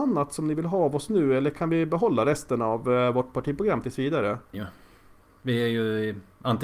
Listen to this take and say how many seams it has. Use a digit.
1